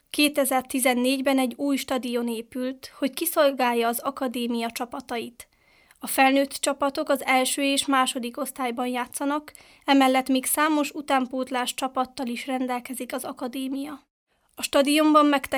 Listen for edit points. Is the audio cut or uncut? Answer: uncut